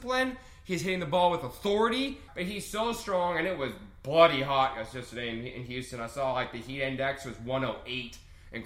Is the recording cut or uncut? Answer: cut